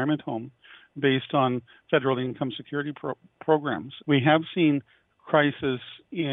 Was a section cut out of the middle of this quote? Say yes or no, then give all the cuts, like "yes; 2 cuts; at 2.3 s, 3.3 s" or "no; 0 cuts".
yes; 1 cut; at 4.0 s